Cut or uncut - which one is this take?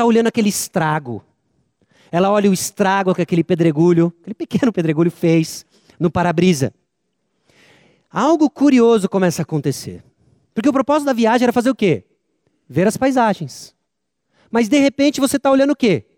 uncut